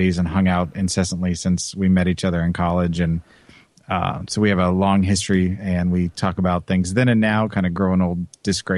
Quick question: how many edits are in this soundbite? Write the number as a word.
zero